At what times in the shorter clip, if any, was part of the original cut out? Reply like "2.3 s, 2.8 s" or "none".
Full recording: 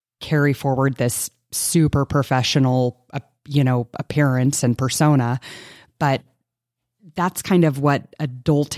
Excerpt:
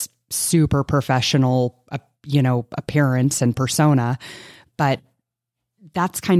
none